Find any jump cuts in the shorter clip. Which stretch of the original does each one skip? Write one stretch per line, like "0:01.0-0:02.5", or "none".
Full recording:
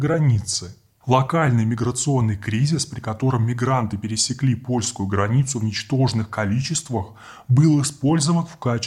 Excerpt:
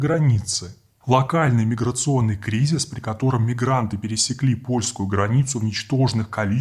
none

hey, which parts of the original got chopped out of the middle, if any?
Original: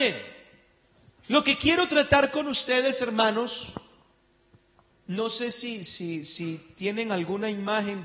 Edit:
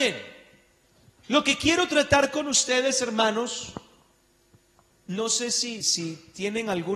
0:05.8-0:06.2

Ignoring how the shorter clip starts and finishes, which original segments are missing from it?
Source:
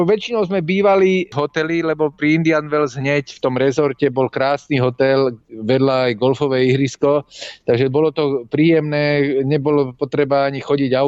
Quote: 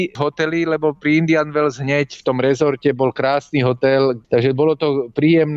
0:05.4-0:07.6

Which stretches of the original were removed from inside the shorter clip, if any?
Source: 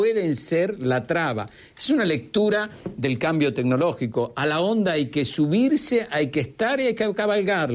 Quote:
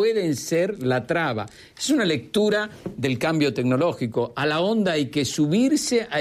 none

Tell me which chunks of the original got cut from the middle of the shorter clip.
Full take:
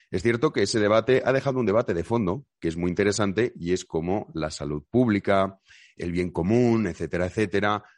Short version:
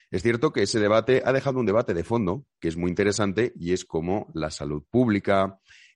none

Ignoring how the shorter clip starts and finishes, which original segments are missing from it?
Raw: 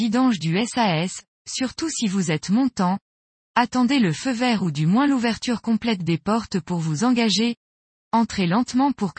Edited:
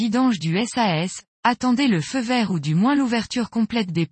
0:01.3-0:03.4

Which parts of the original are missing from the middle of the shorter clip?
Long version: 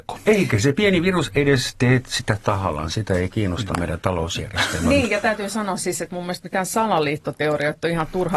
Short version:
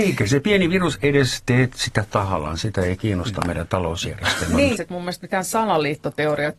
0:05.1-0:06.0

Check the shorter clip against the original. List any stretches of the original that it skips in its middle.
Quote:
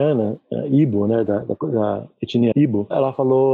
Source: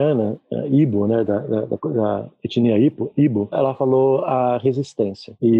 0:01.4-0:01.6
0:02.7-0:03.1

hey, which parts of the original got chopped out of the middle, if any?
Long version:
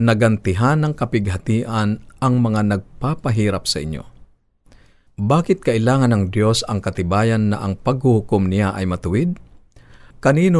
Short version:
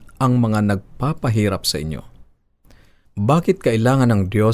none

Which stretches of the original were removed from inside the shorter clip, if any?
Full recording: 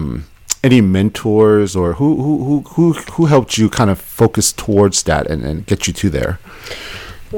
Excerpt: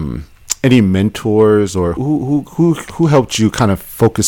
0:02.0-0:02.2

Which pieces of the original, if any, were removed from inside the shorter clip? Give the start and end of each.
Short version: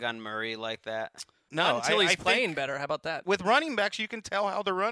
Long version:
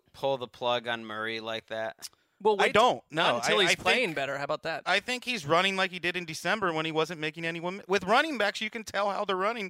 0:02.3-0:03.1
0:04.8-0:07.9

